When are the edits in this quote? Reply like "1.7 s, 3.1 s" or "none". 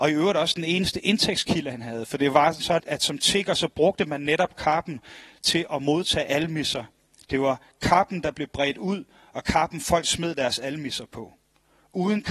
2.8 s

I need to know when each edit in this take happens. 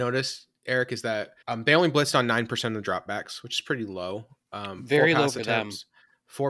1.4 s

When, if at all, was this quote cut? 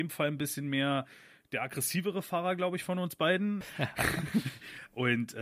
3.6 s

